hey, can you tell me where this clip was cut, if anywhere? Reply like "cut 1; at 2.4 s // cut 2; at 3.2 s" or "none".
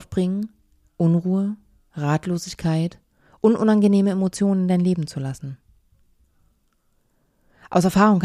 none